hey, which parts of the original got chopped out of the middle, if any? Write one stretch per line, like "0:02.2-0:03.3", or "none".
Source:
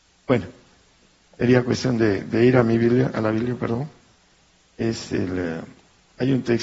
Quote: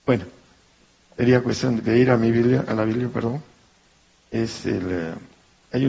0:02.0-0:02.2